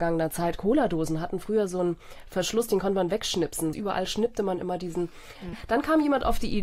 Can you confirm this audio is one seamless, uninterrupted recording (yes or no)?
no